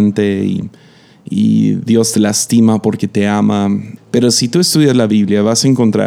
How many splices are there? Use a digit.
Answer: 1